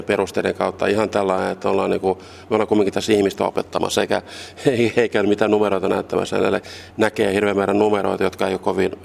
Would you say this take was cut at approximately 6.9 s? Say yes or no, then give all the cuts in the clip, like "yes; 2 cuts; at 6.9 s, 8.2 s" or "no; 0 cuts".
yes; 1 cut; at 6.9 s